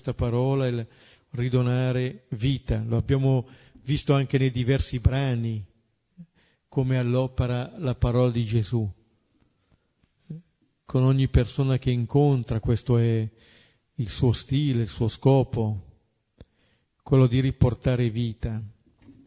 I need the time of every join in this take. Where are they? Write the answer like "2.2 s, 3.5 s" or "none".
none